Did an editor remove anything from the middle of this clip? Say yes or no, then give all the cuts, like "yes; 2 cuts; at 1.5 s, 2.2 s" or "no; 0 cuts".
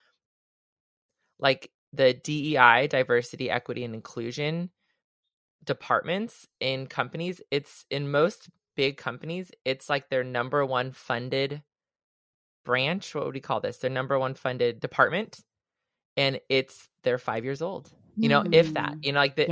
no; 0 cuts